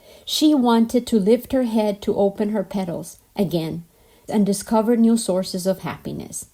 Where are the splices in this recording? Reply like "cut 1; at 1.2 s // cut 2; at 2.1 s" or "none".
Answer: cut 1; at 4.3 s